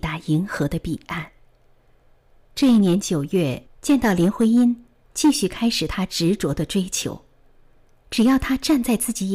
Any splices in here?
yes; 2 cuts; at 2.5 s, 3.7 s

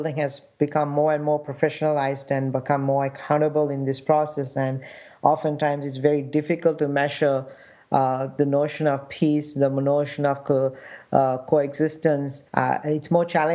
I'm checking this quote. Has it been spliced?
yes; 1 cut; at 12.5 s

